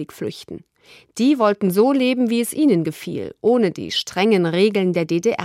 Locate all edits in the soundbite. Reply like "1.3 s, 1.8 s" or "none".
none